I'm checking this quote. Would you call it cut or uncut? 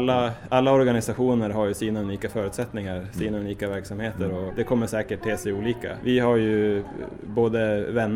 cut